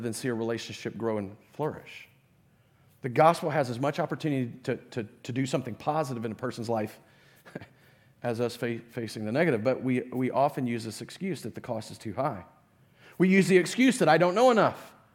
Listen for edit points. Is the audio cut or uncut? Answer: uncut